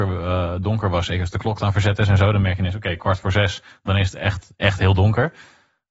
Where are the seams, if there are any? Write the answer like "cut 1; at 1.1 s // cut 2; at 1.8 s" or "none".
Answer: none